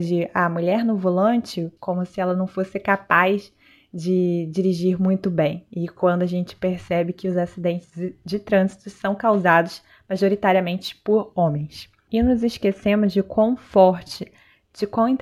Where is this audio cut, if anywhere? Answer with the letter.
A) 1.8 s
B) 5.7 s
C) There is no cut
A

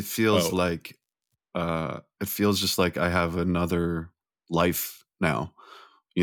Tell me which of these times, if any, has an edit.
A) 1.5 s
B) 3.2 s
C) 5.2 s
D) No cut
D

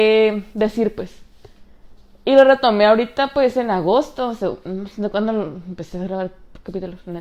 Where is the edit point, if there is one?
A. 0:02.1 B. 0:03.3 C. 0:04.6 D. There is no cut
D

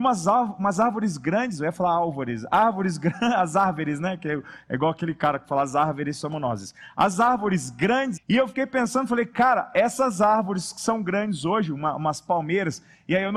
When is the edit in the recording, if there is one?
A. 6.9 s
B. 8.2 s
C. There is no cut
B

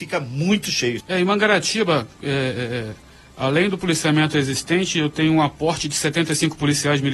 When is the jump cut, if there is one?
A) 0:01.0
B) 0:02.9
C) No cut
A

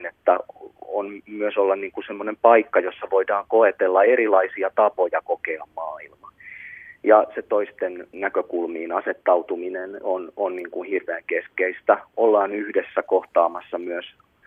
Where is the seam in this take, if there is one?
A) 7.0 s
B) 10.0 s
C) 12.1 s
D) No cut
D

